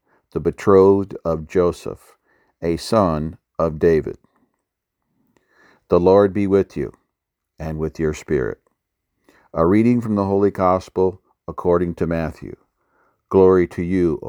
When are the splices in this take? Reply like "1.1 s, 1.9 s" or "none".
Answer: none

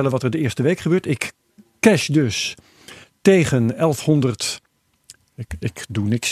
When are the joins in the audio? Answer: 5.4 s

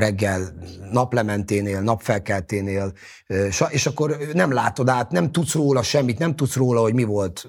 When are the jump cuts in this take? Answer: none

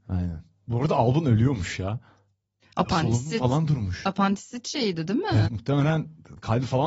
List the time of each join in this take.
5.4 s

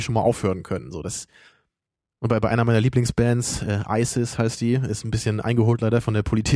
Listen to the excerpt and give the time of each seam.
none

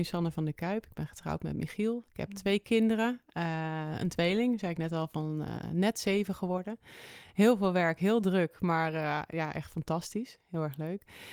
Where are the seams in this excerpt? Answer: none

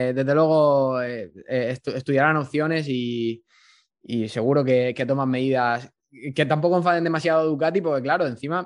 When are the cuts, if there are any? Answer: none

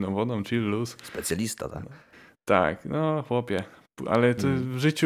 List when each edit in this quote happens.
none

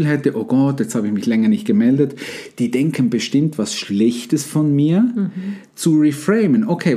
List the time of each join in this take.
none

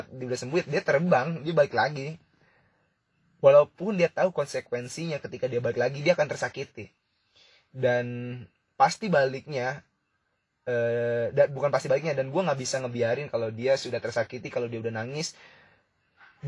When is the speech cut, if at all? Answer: none

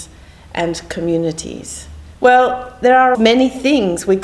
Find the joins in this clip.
2.1 s, 3.1 s

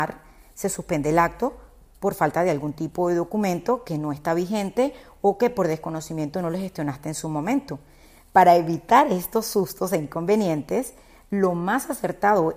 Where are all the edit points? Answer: none

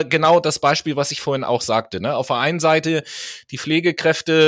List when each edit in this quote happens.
none

